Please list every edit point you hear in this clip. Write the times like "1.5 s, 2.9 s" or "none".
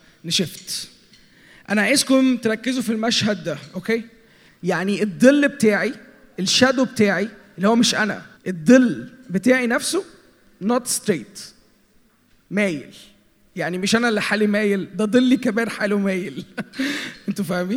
4.5 s, 8.4 s

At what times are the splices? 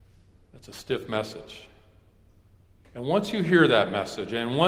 2.8 s

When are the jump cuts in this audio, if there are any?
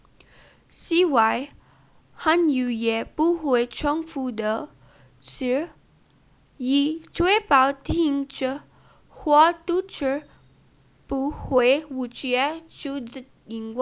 none

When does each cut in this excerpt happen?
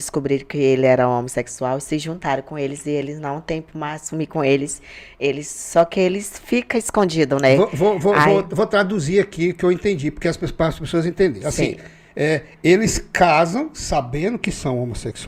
none

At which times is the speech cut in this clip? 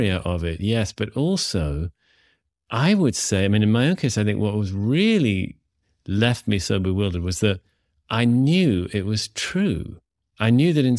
none

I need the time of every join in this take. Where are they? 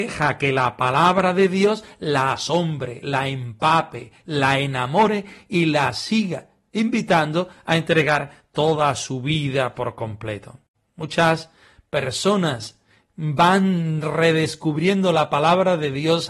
none

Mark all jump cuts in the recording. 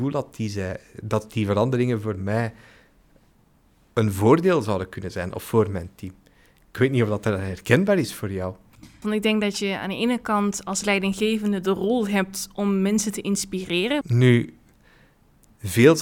9.0 s, 14.0 s

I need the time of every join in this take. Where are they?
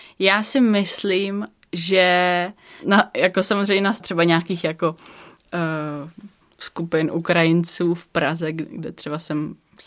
4.0 s

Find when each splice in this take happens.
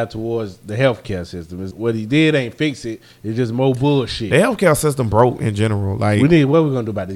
1.7 s

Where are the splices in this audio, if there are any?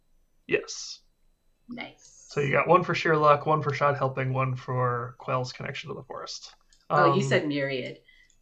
none

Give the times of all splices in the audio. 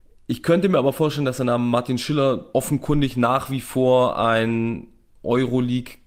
2.5 s

